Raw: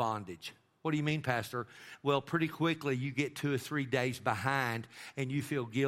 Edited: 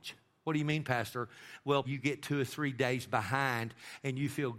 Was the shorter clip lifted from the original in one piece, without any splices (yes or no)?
no